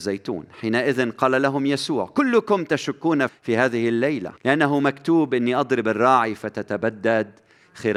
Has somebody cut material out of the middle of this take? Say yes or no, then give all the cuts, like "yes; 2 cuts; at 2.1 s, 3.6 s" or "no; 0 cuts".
yes; 2 cuts; at 3.3 s, 4.4 s